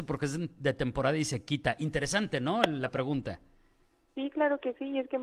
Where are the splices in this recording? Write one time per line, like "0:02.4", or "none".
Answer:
none